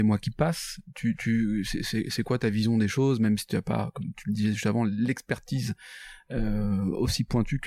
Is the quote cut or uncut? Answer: uncut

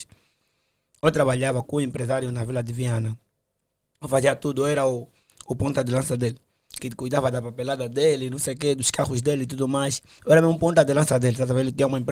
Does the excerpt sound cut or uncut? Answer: cut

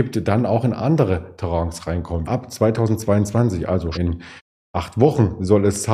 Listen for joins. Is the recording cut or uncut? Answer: cut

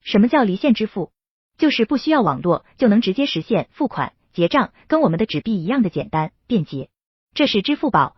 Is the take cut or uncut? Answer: uncut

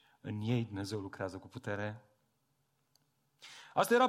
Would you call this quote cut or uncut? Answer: uncut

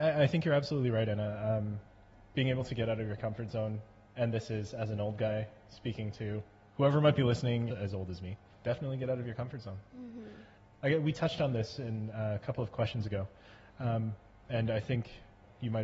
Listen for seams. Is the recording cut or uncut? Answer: cut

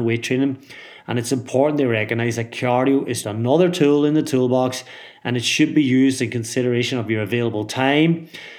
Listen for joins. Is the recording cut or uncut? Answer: cut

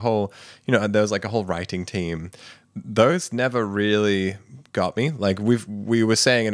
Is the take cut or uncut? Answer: uncut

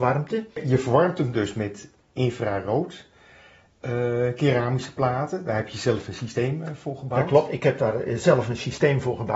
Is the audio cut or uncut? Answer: uncut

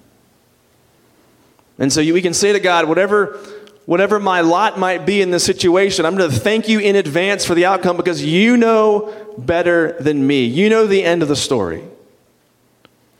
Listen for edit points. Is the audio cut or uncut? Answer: uncut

